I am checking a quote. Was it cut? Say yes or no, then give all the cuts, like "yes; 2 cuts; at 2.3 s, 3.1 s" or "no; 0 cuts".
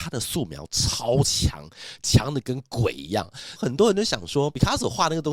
yes; 1 cut; at 3.6 s